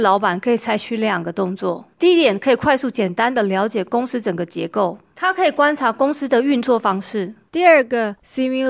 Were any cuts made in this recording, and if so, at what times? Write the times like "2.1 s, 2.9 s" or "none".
none